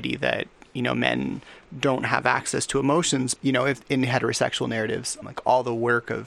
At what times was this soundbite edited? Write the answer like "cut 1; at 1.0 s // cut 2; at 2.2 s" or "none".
cut 1; at 3.4 s // cut 2; at 5.2 s